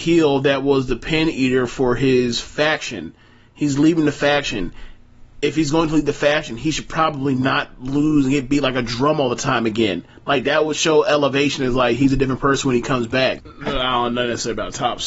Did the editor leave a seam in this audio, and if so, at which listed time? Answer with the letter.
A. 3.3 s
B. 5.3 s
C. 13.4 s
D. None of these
C